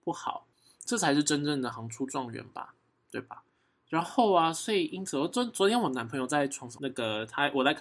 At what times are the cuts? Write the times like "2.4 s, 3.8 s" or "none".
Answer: 1.7 s